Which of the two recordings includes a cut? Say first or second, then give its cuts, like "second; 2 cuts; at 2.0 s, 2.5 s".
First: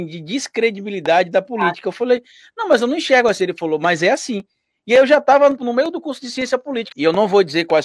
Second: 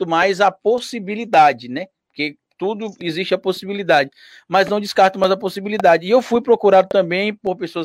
first; 2 cuts; at 5.6 s, 6.9 s